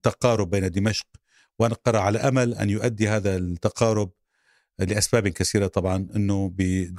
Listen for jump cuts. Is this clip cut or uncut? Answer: uncut